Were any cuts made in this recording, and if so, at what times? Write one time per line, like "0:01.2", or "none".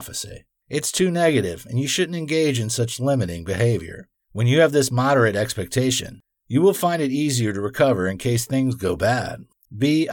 0:04.2